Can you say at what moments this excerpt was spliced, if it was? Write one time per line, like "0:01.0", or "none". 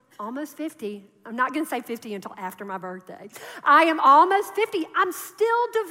none